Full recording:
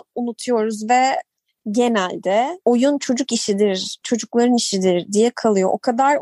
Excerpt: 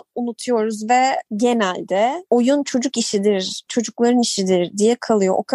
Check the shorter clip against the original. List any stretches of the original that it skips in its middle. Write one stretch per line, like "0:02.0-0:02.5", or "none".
0:01.3-0:01.6